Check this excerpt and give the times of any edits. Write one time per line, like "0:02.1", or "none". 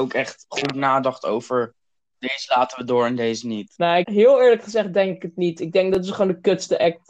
0:04.0